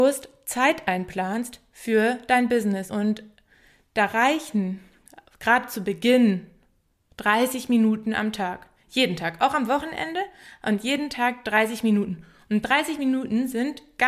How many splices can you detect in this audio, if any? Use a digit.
0